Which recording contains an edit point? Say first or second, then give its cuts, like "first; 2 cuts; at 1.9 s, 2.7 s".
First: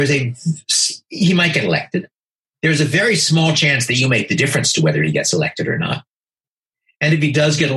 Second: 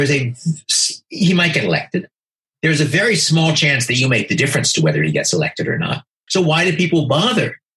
second; 1 cut; at 6.3 s